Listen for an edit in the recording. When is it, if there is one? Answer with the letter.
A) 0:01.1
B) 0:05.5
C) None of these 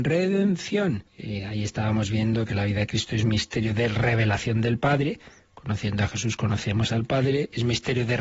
A